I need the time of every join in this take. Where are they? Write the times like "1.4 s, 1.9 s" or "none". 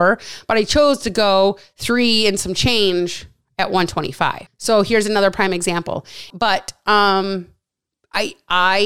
4.5 s, 6.3 s